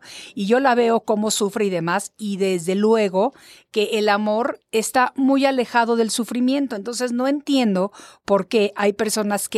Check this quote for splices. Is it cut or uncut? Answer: uncut